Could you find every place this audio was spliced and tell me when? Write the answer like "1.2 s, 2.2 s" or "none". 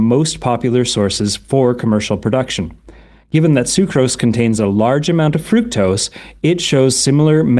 none

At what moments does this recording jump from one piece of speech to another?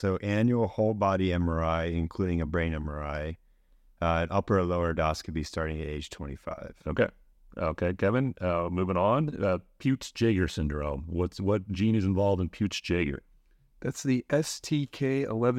none

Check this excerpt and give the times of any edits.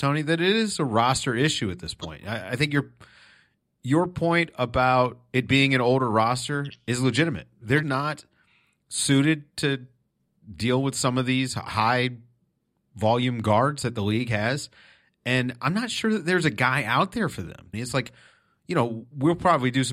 7.8 s, 17.7 s

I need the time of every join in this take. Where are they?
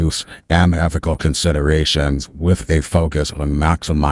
none

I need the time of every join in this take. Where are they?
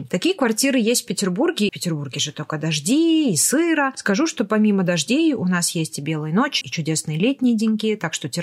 1.7 s, 6.6 s

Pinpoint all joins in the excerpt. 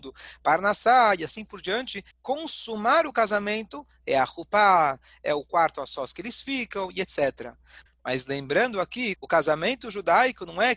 2.1 s, 7.9 s, 9.2 s

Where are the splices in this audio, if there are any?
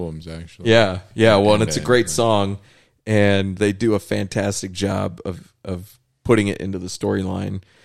none

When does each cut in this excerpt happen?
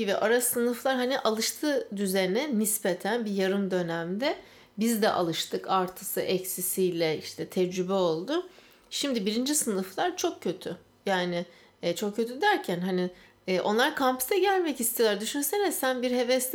none

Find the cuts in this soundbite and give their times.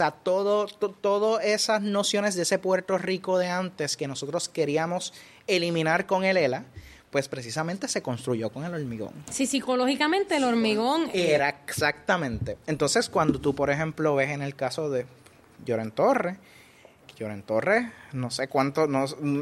11.1 s

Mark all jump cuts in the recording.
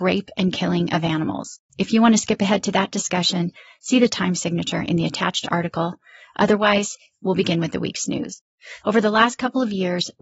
1.7 s, 8.8 s

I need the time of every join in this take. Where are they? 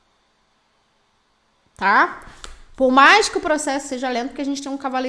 none

